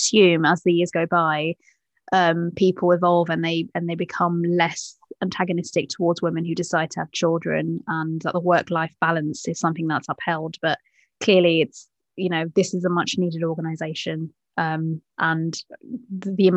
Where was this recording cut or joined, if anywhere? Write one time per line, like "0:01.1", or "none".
0:15.1